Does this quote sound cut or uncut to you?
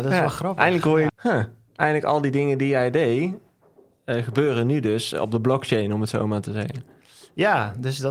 cut